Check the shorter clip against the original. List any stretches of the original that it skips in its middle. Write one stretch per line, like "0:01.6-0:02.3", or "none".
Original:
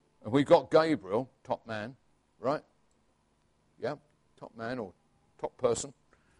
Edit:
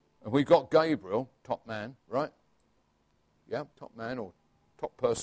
0:02.0-0:02.3
0:04.0-0:04.3